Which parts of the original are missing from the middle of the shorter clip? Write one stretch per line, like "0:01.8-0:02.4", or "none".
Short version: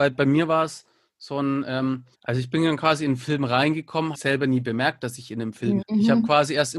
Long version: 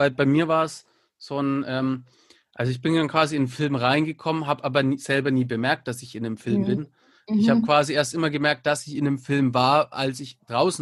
0:02.1-0:02.5
0:04.5-0:05.0
0:06.7-0:07.2